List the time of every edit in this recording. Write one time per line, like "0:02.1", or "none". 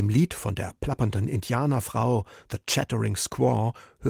none

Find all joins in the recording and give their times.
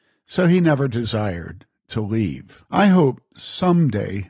0:02.6

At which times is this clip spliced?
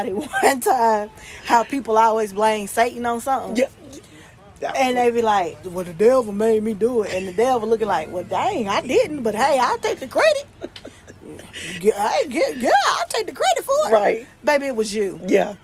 0:05.6

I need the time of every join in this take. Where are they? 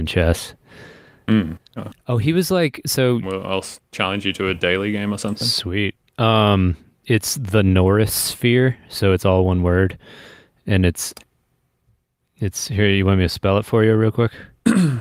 0:01.8
0:03.2

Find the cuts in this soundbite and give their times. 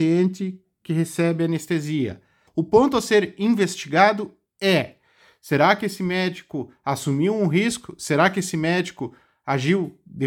0:02.5

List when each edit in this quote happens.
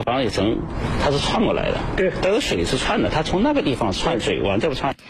none

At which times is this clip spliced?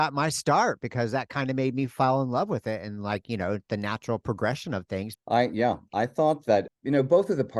0:05.1
0:06.7

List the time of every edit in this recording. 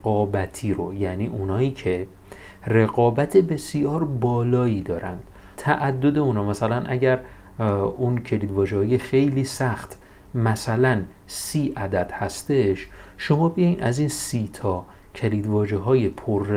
0:05.5

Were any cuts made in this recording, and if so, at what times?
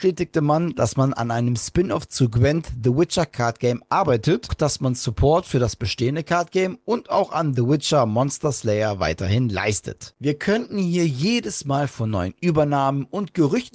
0:04.5
0:10.1

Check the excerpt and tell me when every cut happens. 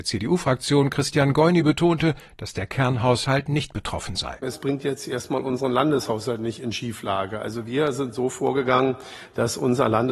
none

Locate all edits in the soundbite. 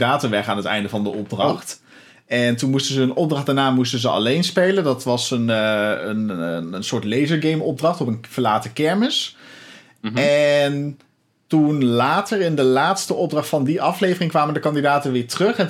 none

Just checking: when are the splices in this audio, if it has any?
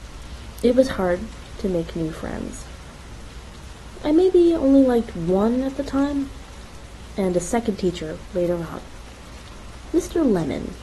0:04.0

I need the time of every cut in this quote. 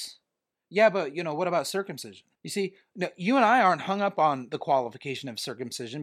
0:02.4

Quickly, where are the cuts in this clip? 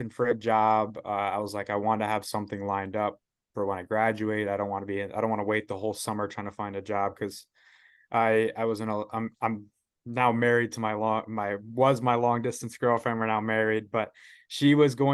none

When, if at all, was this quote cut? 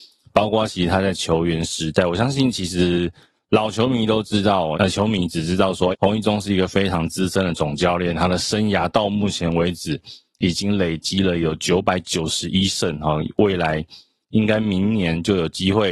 0:04.7
0:05.9

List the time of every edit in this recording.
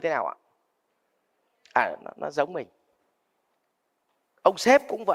0:02.0

